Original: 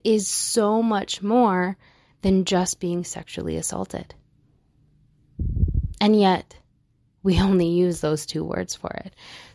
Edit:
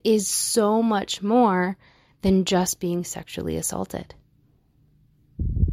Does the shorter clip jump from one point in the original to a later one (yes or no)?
no